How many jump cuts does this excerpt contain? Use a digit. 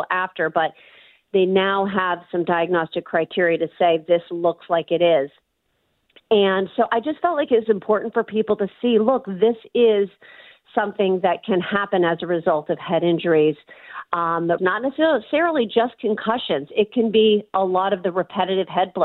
1